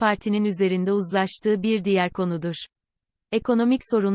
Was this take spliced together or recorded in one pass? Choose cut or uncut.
uncut